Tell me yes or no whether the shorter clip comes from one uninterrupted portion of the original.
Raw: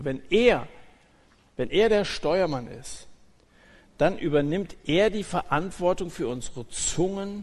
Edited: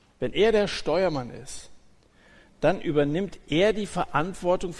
yes